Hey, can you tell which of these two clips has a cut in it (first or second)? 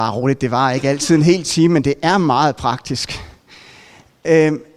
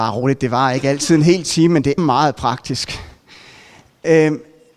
second